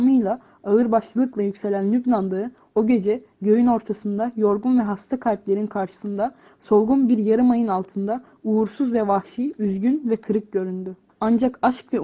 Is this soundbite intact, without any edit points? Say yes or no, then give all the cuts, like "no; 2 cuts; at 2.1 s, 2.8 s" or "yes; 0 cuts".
no; 1 cut; at 11.1 s